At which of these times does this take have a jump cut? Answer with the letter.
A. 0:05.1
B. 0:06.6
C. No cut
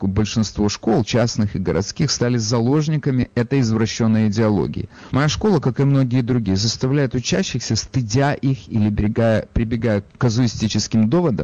A